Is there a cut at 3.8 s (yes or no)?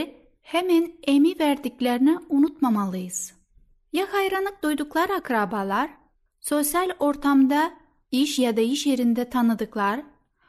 no